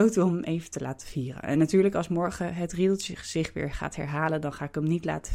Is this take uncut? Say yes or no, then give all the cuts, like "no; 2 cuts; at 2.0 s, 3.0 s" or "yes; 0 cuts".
yes; 0 cuts